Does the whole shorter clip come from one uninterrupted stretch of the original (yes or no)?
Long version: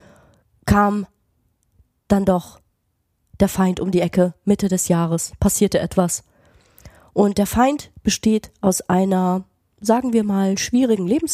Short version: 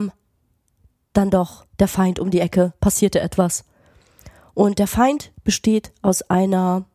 no